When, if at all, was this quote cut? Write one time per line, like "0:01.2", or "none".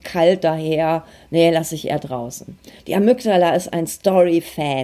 0:02.8